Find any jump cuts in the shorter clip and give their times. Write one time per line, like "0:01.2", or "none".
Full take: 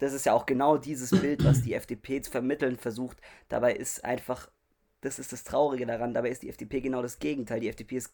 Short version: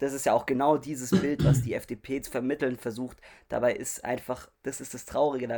0:04.5